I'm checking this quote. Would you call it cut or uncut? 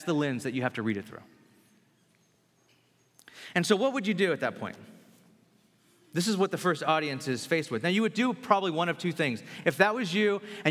uncut